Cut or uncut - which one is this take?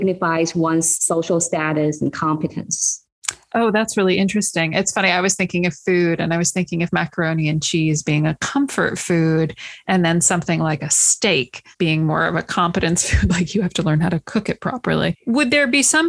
cut